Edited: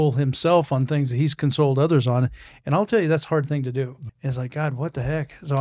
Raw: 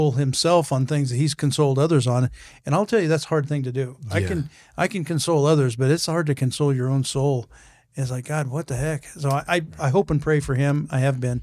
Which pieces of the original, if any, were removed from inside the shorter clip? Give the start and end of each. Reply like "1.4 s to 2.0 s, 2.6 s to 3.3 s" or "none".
4.1 s to 7.8 s